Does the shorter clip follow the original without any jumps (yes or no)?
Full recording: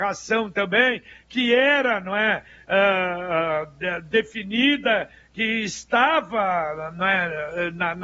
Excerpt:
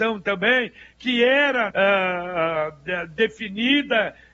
no